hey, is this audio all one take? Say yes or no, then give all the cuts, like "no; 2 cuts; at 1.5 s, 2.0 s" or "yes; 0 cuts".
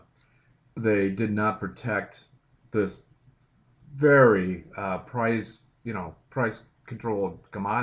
yes; 0 cuts